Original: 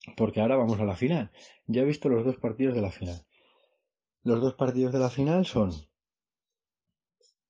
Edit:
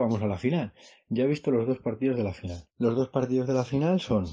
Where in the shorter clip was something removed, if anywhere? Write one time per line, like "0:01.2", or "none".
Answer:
0:02.7